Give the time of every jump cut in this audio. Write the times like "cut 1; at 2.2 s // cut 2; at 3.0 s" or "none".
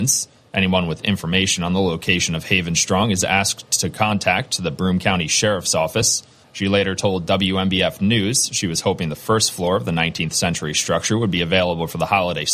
cut 1; at 6.4 s